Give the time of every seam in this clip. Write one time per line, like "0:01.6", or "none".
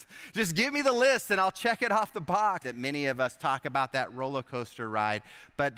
0:02.6